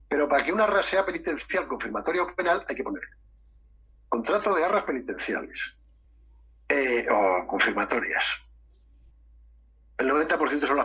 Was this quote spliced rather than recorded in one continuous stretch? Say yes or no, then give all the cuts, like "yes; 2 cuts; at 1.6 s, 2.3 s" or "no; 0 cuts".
no; 0 cuts